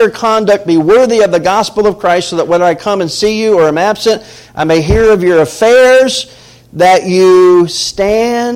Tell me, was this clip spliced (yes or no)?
no